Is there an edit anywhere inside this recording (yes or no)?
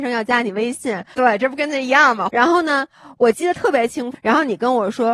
yes